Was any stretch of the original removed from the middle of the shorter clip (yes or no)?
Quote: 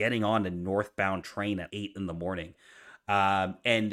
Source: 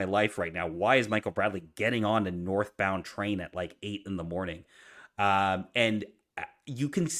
yes